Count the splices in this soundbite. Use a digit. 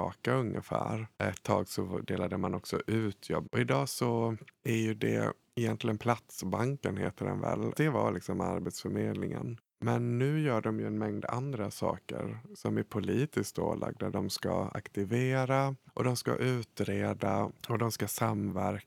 3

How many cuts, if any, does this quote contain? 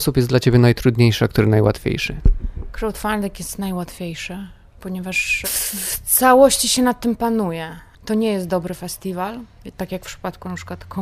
2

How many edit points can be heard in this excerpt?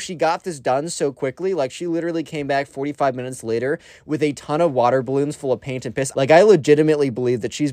1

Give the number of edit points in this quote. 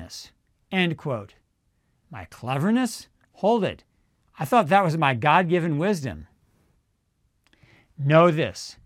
0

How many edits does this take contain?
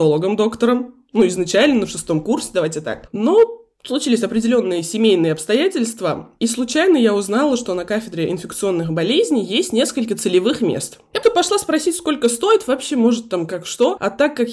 1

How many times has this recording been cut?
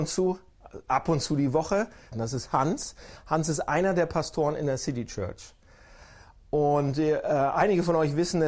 1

